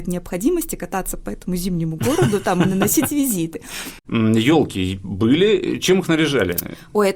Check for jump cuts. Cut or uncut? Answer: cut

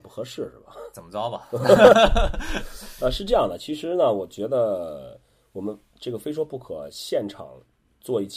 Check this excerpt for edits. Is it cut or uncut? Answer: uncut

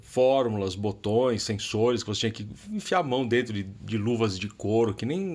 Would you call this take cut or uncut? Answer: uncut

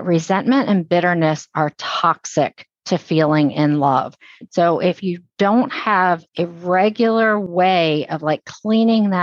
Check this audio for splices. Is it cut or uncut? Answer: cut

